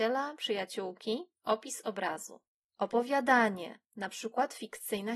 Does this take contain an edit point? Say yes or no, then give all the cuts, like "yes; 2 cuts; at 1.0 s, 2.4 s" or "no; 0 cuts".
yes; 1 cut; at 2.7 s